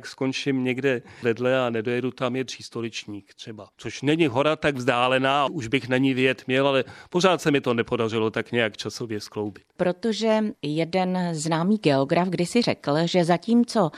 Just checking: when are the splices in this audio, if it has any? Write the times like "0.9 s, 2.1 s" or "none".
3.7 s, 5.5 s, 9.8 s